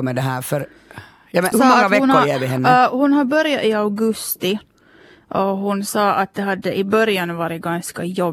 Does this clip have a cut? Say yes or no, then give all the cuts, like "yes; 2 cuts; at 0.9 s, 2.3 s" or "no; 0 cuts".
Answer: yes; 1 cut; at 1.5 s